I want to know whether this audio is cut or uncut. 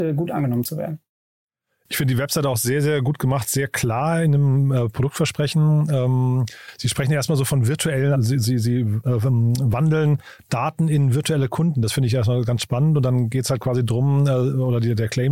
cut